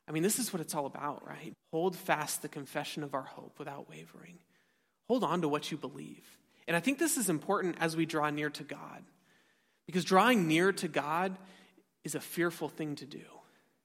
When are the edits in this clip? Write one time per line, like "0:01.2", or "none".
0:01.5